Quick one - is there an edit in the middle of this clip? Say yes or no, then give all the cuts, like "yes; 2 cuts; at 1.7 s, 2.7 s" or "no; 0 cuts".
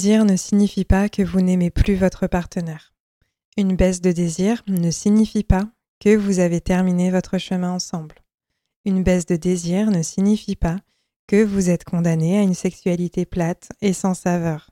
no; 0 cuts